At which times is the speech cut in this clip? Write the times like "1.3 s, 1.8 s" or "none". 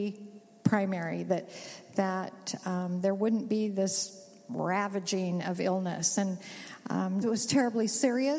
7.2 s